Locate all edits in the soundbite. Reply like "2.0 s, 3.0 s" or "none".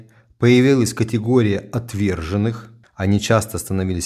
2.8 s